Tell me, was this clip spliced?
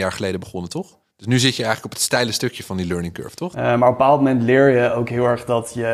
yes; 1 cut; at 3.5 s

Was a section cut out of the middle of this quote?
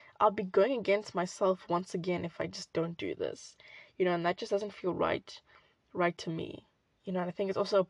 no; 0 cuts

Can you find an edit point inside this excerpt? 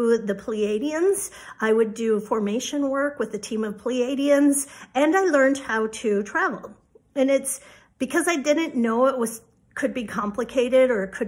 no; 0 cuts

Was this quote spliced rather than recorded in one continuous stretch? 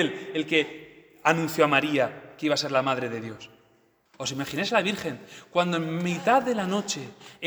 yes; 1 cut; at 4.1 s

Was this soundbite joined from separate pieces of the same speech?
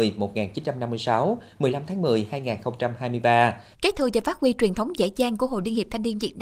yes; 1 cut; at 3.7 s

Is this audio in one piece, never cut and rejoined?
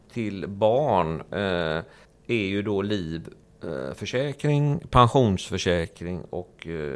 yes; 0 cuts

